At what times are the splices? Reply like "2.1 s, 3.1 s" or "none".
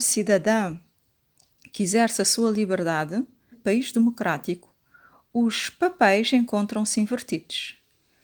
3.5 s